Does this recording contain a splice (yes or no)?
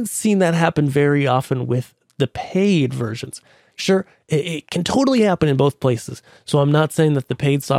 no